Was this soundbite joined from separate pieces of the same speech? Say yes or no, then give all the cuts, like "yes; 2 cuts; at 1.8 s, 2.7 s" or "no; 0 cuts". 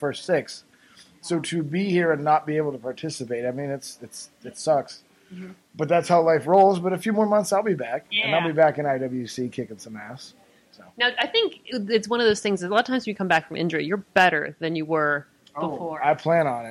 no; 0 cuts